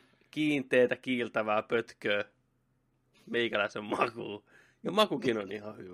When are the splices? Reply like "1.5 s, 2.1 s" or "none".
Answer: none